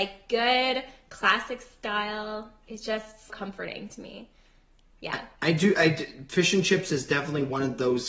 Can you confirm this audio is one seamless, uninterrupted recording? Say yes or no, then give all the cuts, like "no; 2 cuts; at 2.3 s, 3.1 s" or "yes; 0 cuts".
no; 1 cut; at 3.3 s